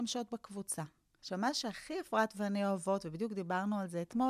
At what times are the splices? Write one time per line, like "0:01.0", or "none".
0:01.2